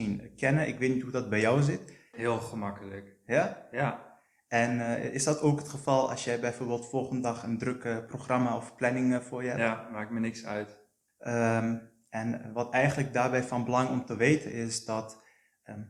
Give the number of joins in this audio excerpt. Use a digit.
2